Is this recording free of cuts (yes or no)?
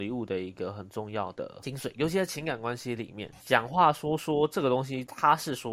no